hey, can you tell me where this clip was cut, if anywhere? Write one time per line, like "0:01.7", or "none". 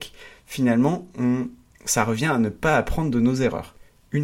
none